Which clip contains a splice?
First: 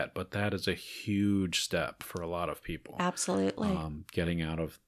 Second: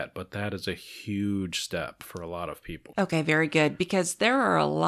second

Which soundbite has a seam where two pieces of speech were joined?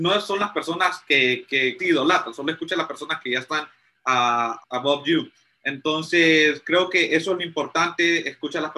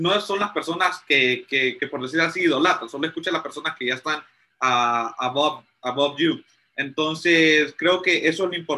first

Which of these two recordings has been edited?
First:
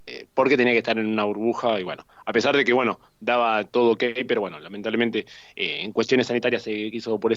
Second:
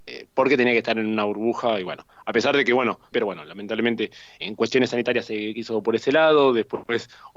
second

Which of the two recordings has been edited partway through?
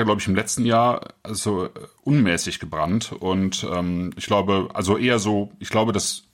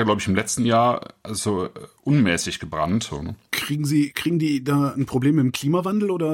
second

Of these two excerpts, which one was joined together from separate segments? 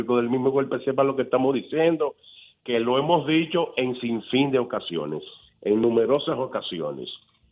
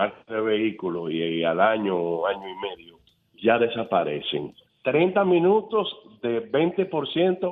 second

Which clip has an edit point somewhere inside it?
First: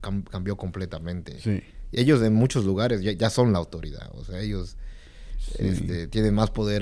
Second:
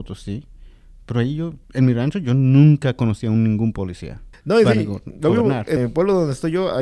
second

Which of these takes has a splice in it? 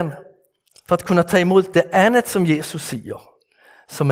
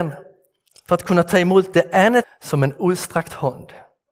second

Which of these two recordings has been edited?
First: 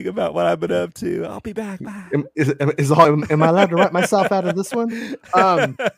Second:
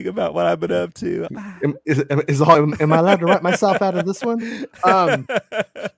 second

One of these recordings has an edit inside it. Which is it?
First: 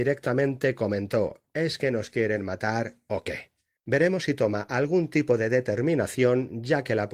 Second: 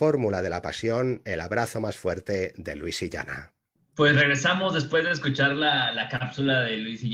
first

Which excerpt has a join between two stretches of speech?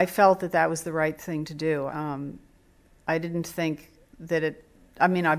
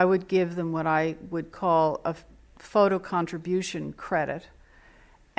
first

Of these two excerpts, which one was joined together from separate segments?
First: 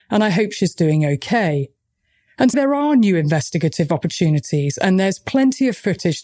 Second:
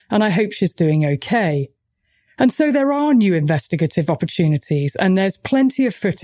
first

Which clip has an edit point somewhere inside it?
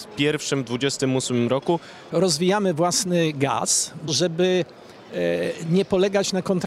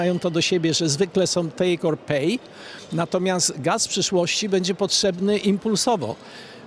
first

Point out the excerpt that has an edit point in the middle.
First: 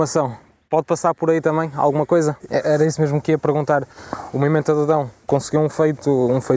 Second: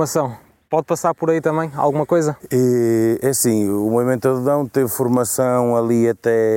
first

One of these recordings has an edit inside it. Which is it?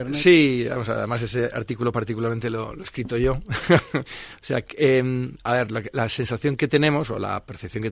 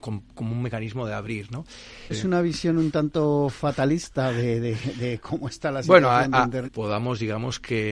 second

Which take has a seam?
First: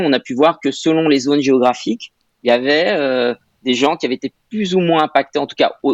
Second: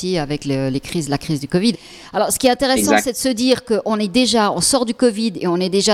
second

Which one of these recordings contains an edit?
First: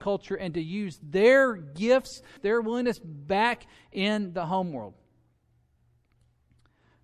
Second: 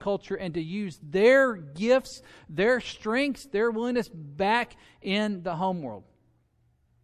first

